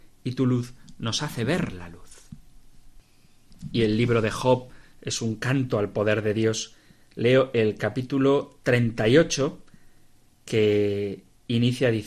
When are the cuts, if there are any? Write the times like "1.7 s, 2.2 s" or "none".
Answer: none